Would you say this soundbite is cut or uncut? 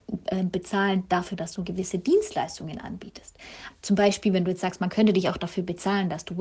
cut